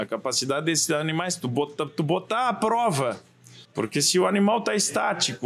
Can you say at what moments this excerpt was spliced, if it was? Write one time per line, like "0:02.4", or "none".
0:03.6